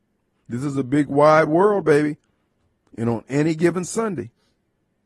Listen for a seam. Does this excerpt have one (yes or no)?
no